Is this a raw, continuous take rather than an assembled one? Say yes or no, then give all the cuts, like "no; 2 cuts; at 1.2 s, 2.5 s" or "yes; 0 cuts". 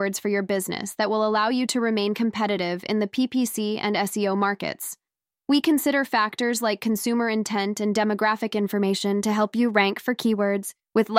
yes; 0 cuts